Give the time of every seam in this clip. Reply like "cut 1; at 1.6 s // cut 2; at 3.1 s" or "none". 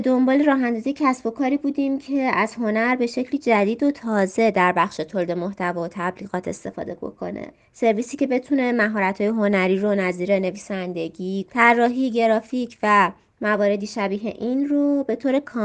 cut 1; at 11.5 s